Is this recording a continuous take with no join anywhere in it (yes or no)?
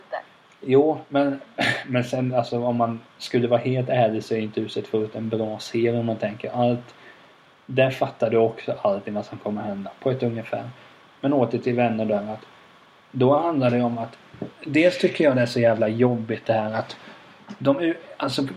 no